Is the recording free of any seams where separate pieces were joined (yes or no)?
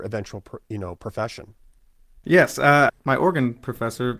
no